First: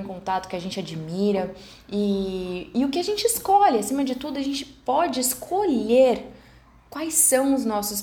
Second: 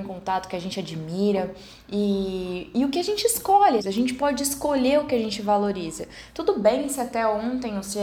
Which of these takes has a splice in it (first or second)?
second